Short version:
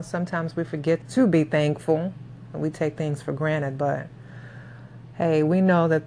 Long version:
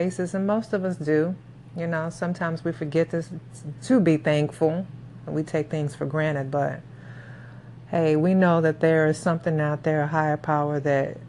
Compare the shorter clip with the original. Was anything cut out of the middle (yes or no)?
yes